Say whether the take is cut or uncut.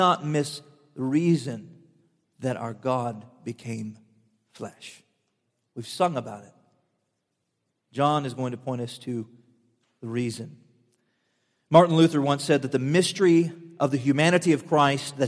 uncut